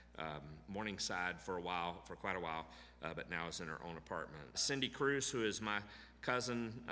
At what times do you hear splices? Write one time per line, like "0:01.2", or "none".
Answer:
0:04.5